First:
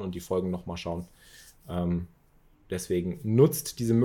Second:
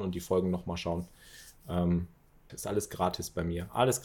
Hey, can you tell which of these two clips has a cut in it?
second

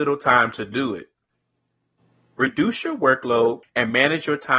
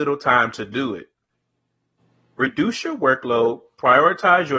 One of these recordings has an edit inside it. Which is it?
first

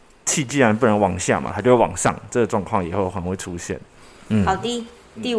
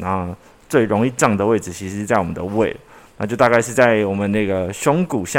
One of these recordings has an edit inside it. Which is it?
first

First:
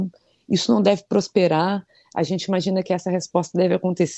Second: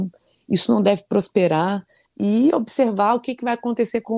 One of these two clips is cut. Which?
second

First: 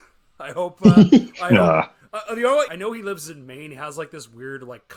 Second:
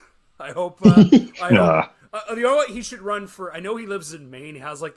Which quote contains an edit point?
first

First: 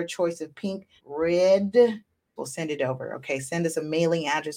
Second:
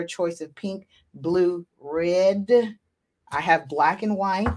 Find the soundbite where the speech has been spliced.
first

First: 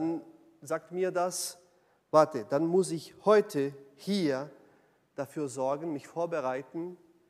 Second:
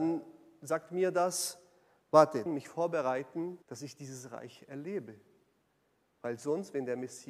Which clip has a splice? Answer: second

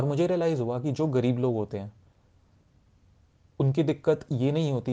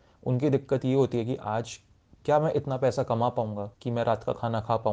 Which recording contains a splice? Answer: second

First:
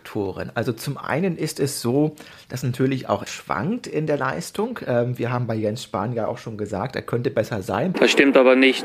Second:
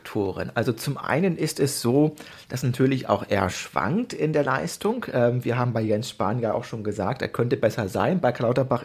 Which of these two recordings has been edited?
first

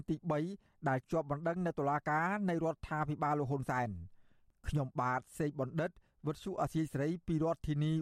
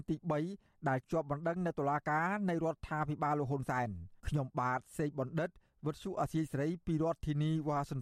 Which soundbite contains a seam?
second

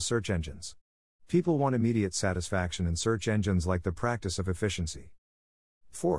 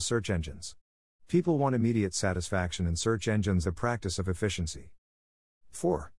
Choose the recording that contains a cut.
second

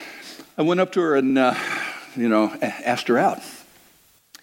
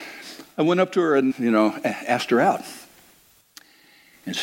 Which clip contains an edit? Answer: second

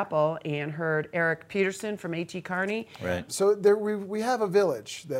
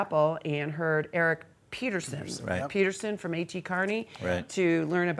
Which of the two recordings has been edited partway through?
first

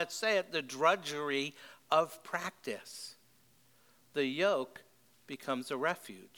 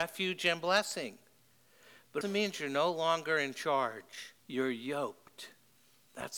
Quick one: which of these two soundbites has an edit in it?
second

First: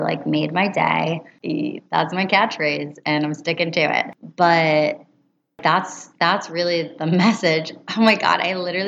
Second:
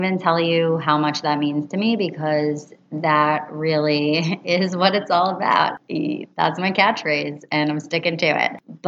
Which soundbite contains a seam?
first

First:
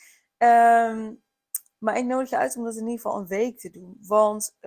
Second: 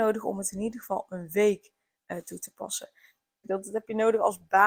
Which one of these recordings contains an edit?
second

